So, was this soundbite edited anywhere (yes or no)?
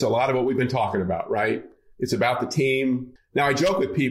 yes